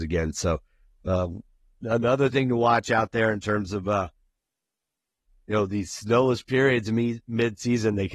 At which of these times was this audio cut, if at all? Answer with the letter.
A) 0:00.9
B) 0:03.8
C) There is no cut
C